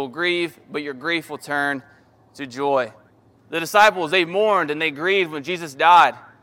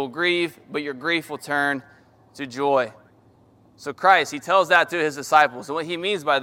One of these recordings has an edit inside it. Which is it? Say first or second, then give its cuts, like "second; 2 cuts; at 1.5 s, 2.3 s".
first; 1 cut; at 3.4 s